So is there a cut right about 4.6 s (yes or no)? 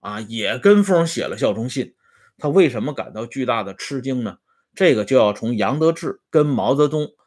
no